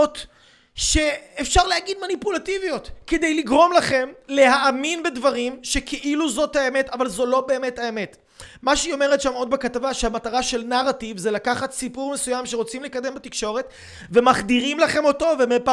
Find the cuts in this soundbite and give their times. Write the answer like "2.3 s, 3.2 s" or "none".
none